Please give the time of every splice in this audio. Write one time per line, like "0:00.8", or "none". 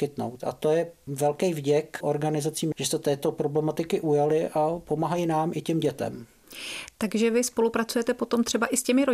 0:02.7